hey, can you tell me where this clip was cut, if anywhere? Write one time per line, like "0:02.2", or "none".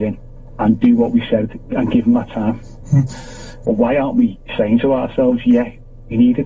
0:03.6

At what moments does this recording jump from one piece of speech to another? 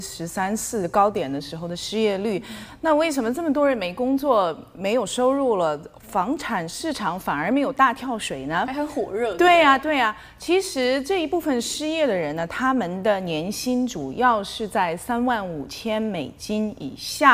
none

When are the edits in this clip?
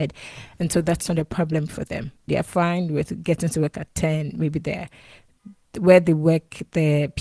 0:02.3

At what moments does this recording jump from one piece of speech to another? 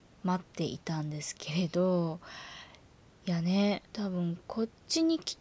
0:03.9

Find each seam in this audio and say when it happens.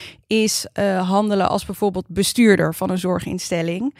none

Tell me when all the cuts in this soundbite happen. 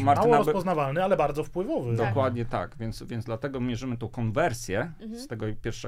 none

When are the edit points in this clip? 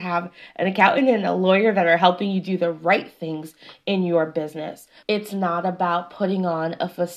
0:05.0

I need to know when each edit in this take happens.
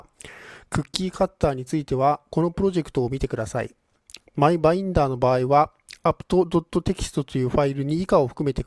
0:04.3

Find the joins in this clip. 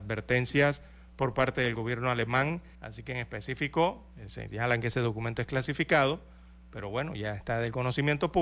0:02.7

